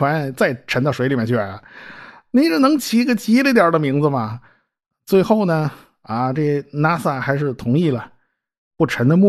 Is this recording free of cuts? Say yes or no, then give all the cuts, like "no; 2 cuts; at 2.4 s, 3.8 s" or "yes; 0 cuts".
yes; 0 cuts